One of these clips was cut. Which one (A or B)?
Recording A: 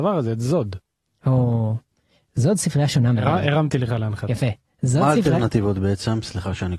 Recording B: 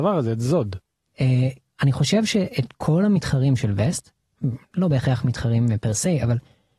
B